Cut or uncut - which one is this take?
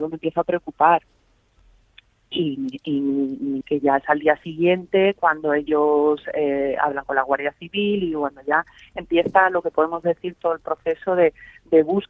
cut